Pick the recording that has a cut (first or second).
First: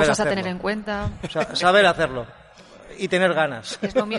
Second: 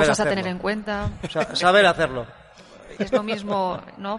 second